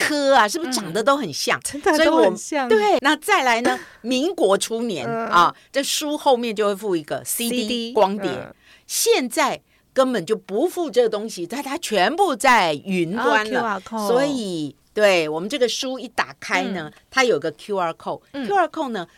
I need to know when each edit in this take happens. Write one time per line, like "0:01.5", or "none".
0:03.0

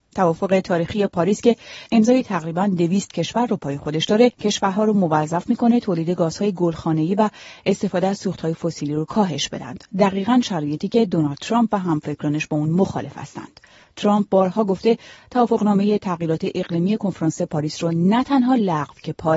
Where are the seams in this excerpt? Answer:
none

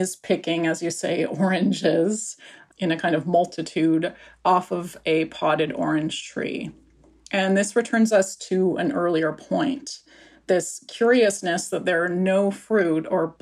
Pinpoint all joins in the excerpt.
0:02.7

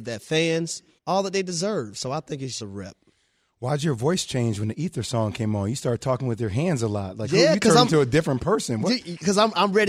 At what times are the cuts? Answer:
0:01.0
0:02.6

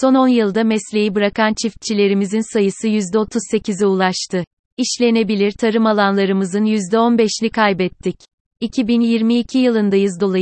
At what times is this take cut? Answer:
0:08.5

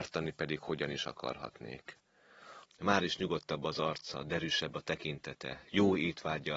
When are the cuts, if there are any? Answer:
0:02.6

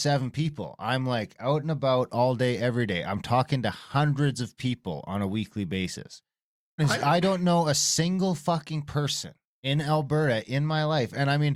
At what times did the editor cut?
0:06.8

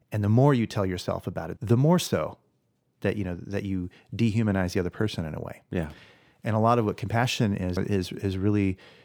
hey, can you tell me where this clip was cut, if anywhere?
0:01.6
0:07.8

